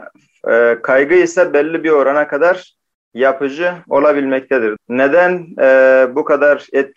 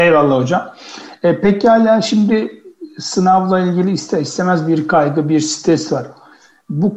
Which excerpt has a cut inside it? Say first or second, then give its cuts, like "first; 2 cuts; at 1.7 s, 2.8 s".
first; 1 cut; at 4.8 s